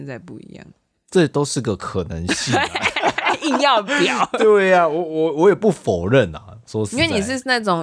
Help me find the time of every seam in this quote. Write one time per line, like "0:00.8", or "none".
none